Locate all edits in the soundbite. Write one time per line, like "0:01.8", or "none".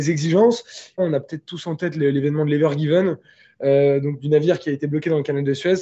0:01.0